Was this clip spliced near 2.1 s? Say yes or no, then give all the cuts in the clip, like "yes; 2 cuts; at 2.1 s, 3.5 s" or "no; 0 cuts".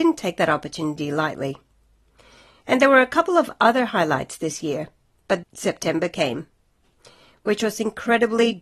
no; 1 cut; at 5.4 s